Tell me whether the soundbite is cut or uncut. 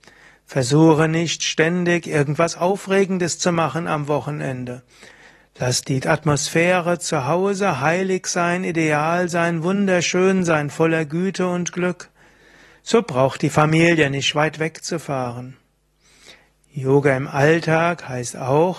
uncut